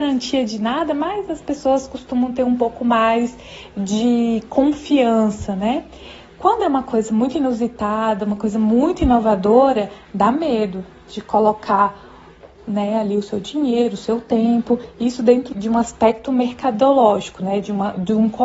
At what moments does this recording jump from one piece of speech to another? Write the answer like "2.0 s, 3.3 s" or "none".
15.5 s